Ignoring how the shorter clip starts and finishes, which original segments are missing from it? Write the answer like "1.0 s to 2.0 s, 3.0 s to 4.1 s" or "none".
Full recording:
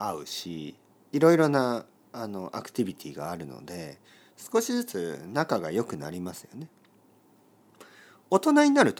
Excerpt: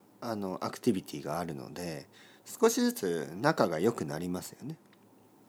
none